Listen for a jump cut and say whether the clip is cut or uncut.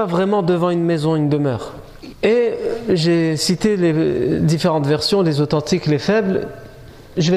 cut